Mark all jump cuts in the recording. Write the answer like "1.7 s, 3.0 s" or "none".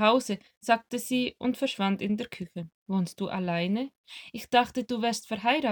2.8 s